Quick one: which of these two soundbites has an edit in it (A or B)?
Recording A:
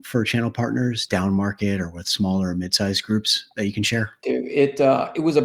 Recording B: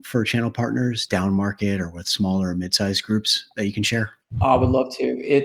A